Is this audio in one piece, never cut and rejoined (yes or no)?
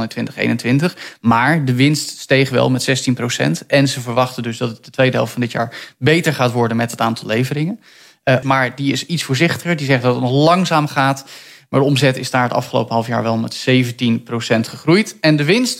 no